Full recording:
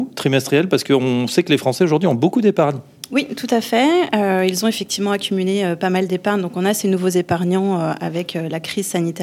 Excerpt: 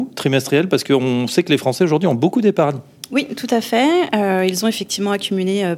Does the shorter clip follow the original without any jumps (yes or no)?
yes